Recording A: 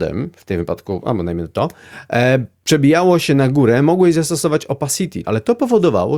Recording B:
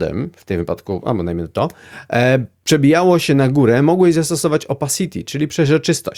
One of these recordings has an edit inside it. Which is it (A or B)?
A